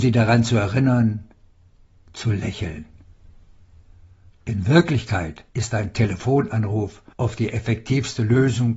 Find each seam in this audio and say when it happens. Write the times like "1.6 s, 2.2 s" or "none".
4.3 s, 5.5 s, 7.1 s